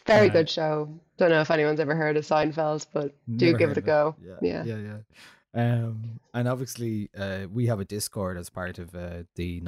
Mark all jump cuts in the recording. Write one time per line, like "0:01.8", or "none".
none